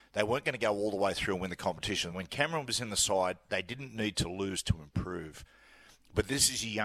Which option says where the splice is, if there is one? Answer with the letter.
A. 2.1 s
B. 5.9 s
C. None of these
A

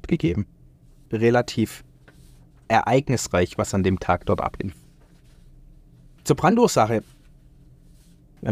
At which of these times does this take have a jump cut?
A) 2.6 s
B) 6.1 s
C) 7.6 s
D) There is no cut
D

